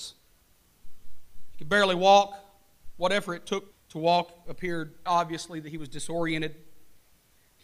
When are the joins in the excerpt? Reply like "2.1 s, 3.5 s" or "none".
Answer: 3.7 s, 5.1 s